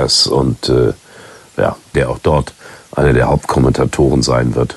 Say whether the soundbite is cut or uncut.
cut